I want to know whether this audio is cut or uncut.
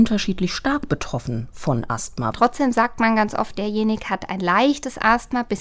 cut